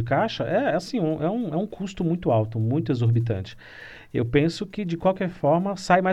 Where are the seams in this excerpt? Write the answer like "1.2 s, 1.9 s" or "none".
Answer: none